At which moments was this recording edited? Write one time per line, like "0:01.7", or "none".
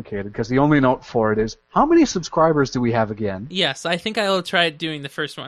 none